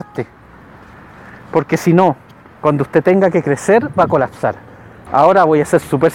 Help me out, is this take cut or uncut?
cut